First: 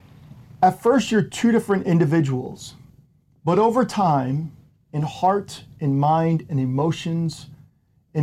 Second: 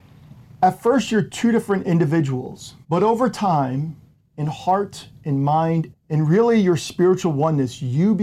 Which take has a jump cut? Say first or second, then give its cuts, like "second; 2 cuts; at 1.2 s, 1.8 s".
second; 2 cuts; at 2.8 s, 5.9 s